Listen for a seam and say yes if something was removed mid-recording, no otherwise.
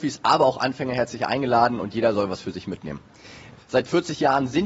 yes